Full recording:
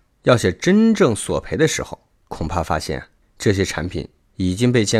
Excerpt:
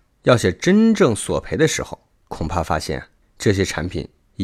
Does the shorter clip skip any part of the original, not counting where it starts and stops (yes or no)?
no